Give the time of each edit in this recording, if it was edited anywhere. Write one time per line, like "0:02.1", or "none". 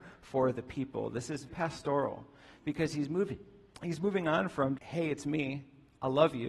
0:01.5
0:04.8